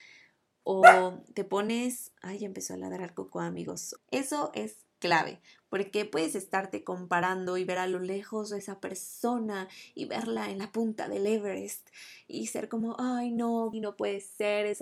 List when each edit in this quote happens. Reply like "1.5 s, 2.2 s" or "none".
4.0 s, 13.7 s